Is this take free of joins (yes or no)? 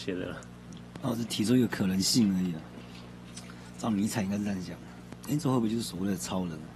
yes